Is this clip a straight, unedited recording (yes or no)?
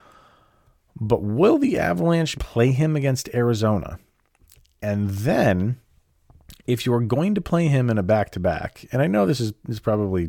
no